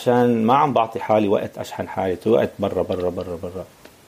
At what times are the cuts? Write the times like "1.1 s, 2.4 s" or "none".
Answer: none